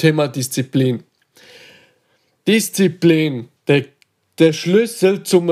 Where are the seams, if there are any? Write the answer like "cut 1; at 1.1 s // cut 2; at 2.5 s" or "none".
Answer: cut 1; at 3.6 s